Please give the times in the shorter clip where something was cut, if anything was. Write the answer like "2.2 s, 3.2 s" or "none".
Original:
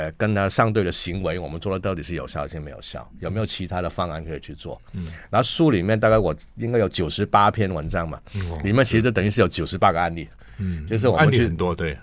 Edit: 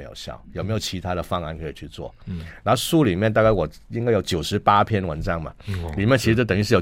none